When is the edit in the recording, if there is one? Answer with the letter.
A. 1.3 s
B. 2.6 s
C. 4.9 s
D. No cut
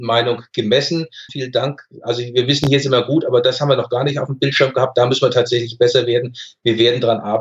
A